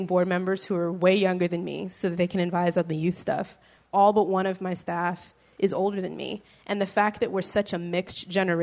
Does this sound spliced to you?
no; 0 cuts

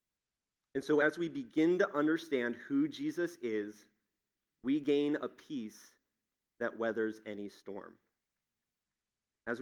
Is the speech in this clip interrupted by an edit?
no; 0 cuts

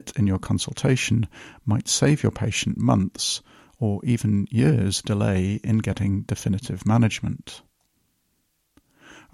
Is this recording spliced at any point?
no; 0 cuts

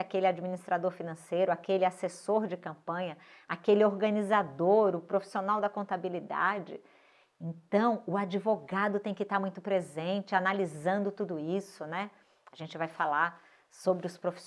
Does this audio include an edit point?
no; 0 cuts

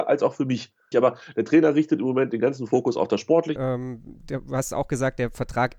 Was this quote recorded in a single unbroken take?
no; 2 cuts; at 0.9 s, 3.6 s

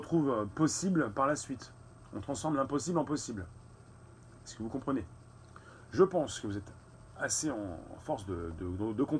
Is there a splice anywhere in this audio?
no; 0 cuts

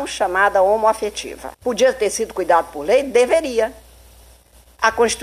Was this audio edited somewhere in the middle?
yes; 1 cut; at 1.5 s

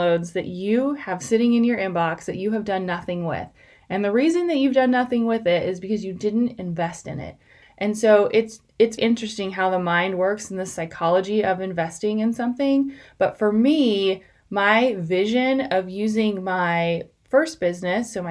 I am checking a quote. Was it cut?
yes; 2 cuts; at 7.6 s, 9.0 s

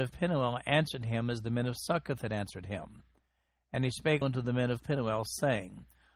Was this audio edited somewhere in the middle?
yes; 1 cut; at 4.2 s

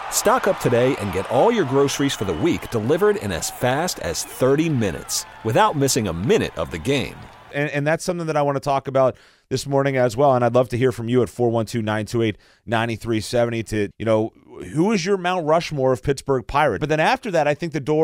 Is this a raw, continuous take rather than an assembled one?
no; 3 cuts; at 7.5 s, 13.9 s, 16.8 s

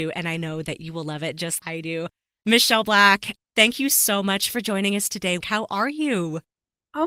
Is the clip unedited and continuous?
no; 2 cuts; at 1.6 s, 5.4 s

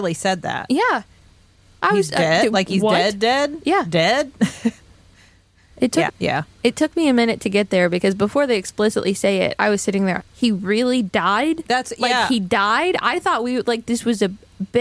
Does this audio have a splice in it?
yes; 2 cuts; at 6.1 s, 10.2 s

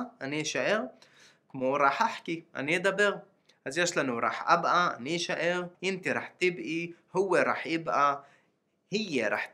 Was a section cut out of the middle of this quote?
yes; 1 cut; at 5.7 s

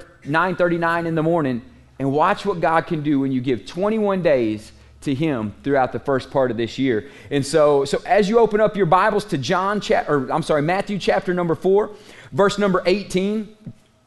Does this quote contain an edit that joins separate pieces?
no; 0 cuts

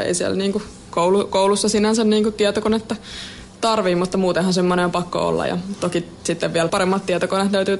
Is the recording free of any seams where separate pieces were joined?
no; 1 cut; at 6.7 s

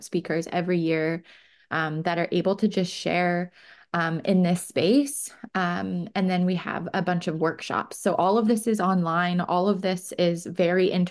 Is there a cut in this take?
no; 0 cuts

